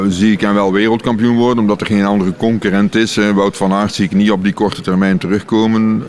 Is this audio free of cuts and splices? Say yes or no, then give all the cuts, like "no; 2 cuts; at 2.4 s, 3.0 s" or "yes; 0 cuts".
yes; 0 cuts